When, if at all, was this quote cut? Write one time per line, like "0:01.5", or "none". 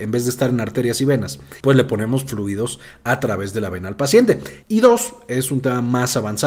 0:01.6
0:04.6